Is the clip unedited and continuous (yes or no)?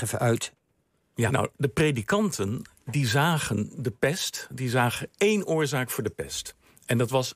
no